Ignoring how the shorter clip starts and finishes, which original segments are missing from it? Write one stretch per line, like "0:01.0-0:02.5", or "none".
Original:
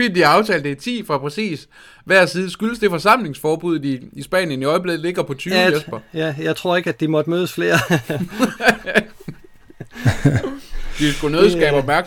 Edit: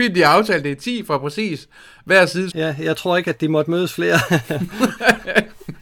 0:02.5-0:06.1